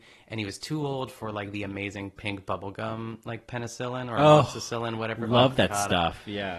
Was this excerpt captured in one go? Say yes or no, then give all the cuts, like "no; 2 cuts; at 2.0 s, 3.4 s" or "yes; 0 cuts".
yes; 0 cuts